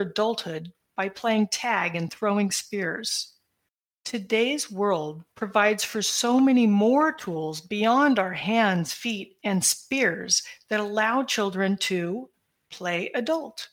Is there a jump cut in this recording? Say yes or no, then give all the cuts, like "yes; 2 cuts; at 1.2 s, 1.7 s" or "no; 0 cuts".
no; 0 cuts